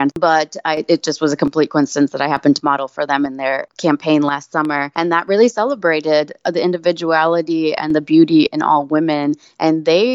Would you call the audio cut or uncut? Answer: uncut